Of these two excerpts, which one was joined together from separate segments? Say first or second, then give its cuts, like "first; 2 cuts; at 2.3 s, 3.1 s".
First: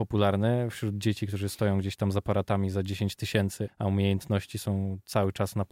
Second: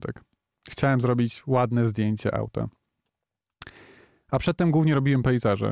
first; 1 cut; at 3.7 s